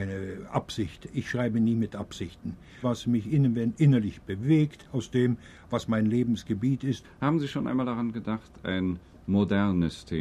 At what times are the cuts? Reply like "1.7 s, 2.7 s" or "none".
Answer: 2.8 s, 7.0 s